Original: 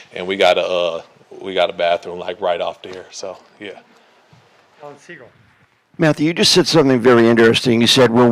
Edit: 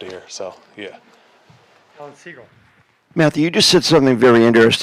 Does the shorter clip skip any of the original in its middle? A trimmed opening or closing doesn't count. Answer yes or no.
no